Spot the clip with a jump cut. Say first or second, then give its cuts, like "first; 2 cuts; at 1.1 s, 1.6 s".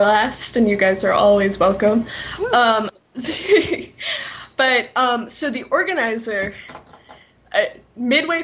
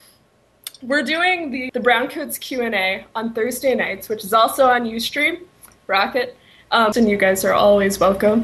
second; 2 cuts; at 1.7 s, 6.9 s